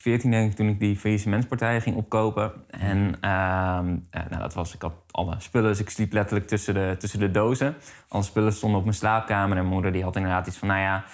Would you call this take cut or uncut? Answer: uncut